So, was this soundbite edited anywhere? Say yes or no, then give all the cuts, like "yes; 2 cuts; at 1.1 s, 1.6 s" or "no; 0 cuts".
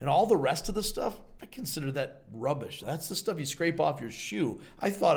yes; 2 cuts; at 1.4 s, 2.8 s